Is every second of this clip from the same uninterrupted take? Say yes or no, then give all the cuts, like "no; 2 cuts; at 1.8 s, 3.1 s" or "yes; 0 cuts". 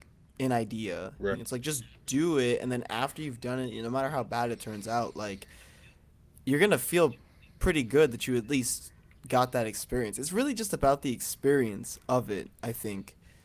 no; 1 cut; at 1.3 s